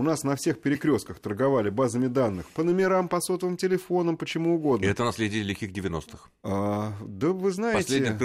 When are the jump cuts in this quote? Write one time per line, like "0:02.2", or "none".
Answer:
none